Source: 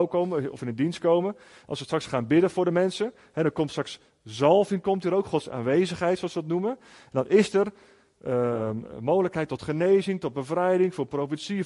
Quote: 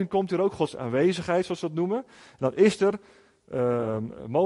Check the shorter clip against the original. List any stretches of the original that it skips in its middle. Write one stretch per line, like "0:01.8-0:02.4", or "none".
none